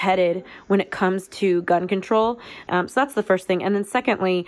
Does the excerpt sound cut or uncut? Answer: cut